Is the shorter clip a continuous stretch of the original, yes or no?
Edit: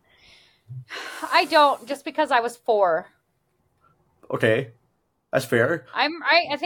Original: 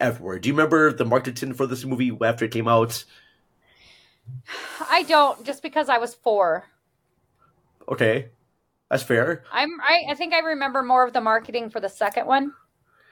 yes